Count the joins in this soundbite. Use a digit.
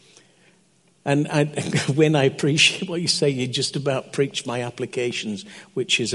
0